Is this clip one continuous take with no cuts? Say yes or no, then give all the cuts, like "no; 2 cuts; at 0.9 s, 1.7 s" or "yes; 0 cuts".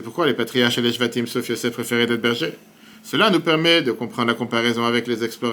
yes; 0 cuts